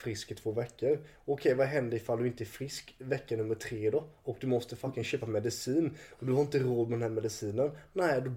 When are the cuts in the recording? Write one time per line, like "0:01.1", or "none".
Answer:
none